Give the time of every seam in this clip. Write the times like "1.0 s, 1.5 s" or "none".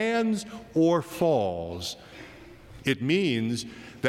2.8 s